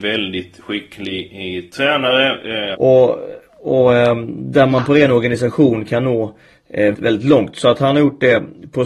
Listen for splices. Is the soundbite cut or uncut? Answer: cut